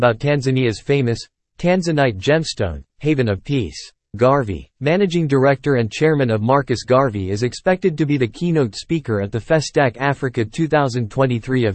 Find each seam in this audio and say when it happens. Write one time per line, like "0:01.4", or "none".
0:02.9
0:04.1